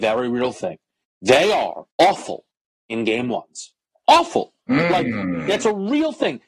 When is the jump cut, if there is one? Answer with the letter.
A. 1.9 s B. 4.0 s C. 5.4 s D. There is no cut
A